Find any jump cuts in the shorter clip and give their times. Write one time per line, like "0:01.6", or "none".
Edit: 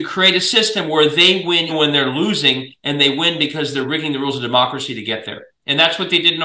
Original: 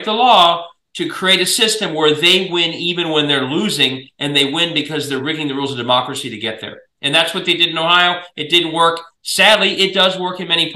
0:01.7

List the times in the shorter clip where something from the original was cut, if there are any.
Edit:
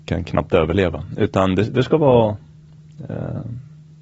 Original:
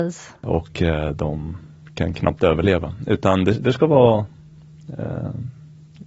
none

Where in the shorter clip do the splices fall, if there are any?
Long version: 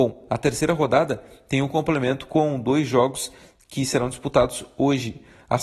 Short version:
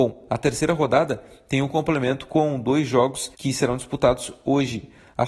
0:03.3

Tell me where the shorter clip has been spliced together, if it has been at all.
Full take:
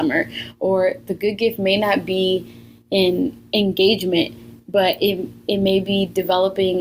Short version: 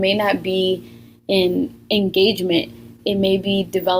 0:03.0

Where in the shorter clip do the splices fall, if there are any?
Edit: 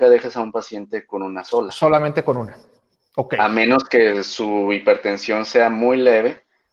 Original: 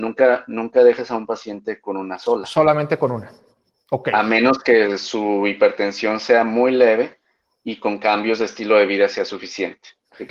none

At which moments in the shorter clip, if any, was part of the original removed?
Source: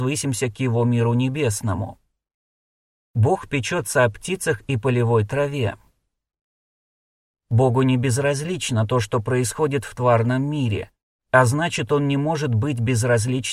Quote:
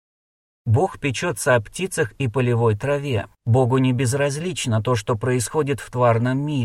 0:03.3

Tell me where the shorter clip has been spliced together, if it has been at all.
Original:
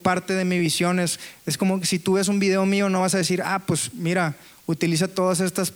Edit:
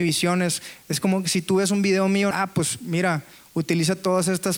0:02.3

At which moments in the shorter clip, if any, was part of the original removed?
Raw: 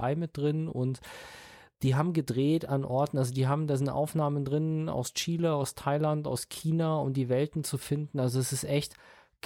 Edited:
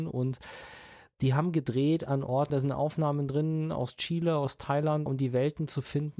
0:02.5
0:05.1

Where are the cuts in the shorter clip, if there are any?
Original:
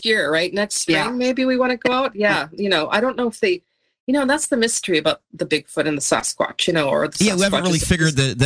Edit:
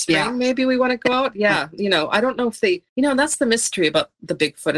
0:02.9

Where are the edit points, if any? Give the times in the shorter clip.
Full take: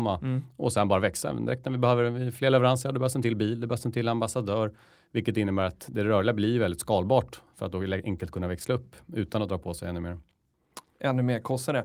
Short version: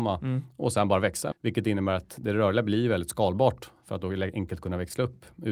0:01.3

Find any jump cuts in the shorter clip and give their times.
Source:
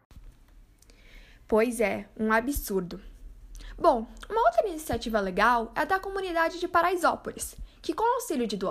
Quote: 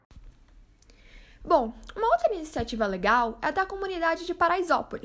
0:01.4

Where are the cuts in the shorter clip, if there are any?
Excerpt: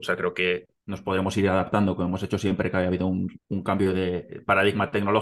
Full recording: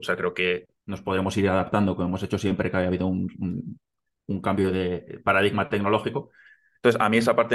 0:03.4

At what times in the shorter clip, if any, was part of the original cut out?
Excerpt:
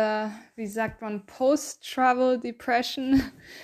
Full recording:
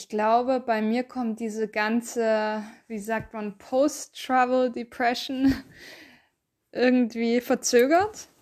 none

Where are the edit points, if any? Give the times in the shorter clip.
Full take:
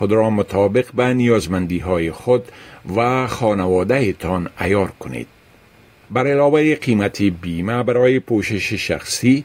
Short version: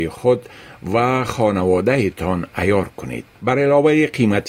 0:03.3

